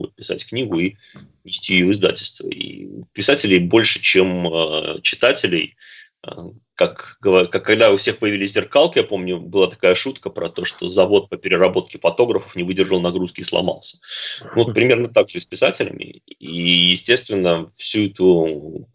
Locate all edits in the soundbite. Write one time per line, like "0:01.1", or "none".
none